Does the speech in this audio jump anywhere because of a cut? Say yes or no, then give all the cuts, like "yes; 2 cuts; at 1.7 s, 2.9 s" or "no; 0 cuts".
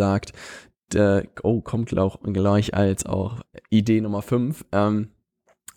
no; 0 cuts